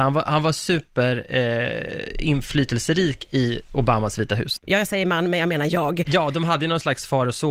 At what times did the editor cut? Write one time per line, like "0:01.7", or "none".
0:04.6